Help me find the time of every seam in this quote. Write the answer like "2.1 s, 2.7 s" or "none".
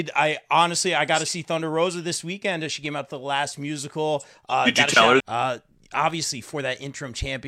5.2 s